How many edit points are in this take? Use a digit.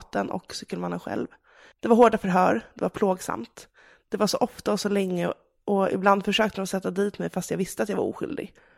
1